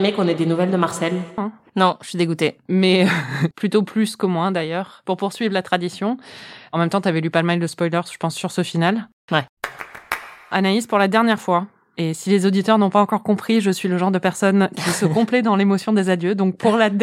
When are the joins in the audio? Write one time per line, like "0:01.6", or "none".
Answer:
0:01.4
0:03.5